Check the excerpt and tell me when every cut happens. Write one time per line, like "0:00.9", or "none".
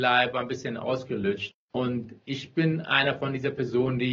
0:01.5